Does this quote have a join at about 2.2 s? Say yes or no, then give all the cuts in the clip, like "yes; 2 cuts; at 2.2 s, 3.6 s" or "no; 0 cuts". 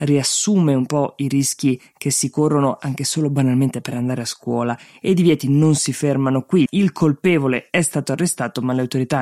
no; 1 cut; at 6.7 s